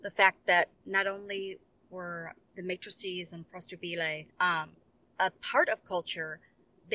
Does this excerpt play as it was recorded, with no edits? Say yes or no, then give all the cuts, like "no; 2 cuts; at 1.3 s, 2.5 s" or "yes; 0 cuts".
no; 2 cuts; at 2.4 s, 4.3 s